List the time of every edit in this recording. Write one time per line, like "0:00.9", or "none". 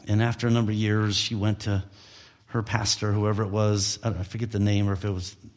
none